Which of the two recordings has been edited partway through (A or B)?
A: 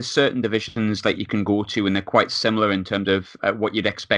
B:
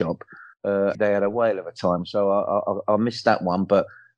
B